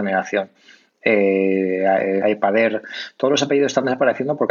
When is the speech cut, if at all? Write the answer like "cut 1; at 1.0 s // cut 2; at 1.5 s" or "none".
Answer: cut 1; at 2.2 s

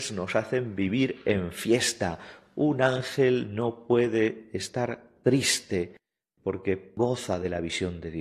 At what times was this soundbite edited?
none

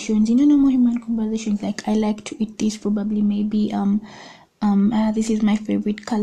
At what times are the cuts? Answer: none

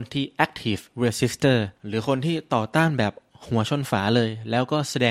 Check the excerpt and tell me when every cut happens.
cut 1; at 1.8 s

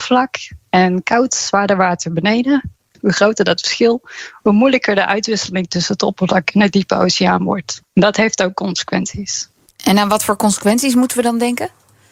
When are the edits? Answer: none

